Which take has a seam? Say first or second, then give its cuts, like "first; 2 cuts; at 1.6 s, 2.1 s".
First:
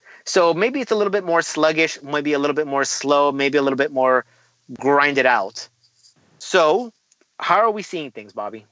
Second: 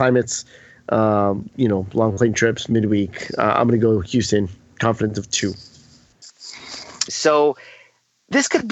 second; 2 cuts; at 1.5 s, 7.1 s